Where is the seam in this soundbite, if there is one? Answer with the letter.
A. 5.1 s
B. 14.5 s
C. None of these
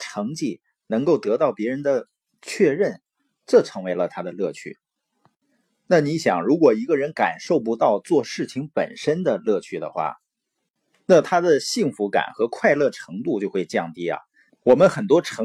B